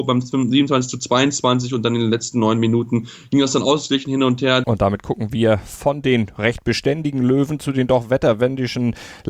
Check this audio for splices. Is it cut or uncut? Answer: cut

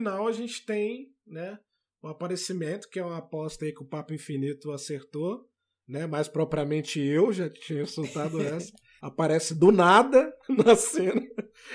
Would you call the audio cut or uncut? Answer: cut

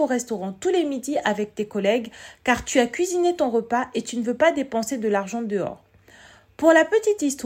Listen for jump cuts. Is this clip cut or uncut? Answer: uncut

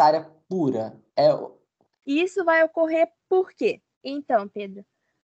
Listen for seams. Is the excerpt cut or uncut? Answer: cut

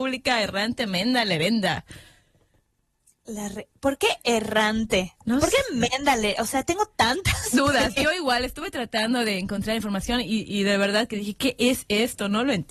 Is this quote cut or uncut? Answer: cut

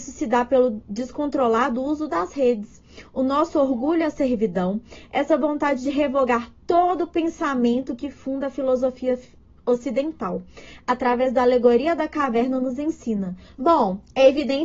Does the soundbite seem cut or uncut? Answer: cut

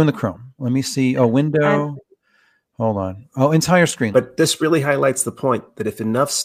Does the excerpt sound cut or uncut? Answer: cut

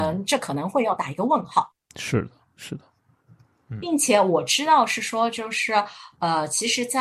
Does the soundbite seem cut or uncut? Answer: uncut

